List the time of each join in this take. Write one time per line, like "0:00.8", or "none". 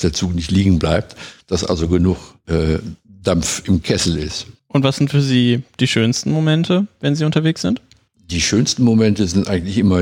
0:04.5